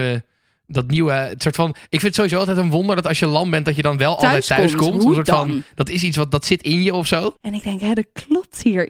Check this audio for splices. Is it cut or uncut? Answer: cut